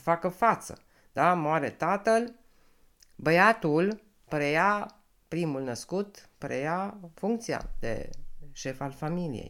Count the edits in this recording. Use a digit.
0